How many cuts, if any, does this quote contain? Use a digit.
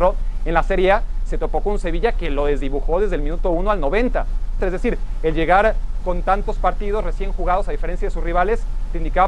1